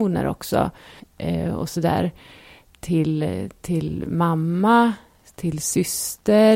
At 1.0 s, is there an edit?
yes; 1 cut; at 1.0 s

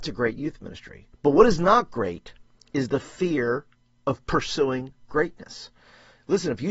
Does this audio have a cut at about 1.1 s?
yes; 1 cut; at 1.1 s

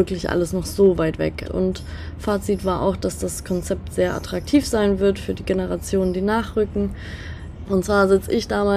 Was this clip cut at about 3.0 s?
no; 2 cuts; at 1.4 s, 7.6 s

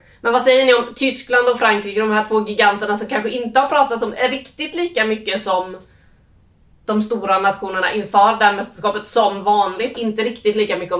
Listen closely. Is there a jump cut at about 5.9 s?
no; 1 cut; at 9.9 s

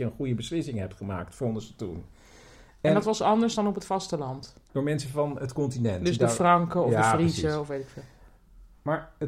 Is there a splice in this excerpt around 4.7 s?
yes; 1 cut; at 4.7 s

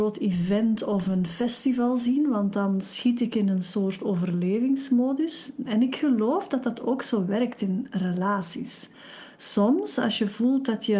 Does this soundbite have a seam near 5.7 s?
yes; 1 cut; at 5.7 s

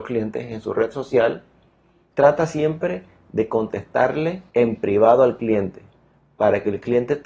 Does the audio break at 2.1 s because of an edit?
yes; 2 cuts; at 2.1 s, 4.5 s

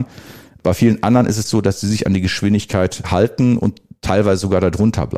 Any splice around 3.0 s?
yes; 1 cut; at 3.0 s

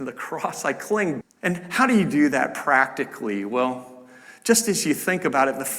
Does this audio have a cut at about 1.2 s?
yes; 1 cut; at 1.2 s

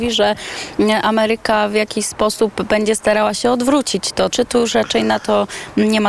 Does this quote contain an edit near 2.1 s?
no; 1 cut; at 4.3 s

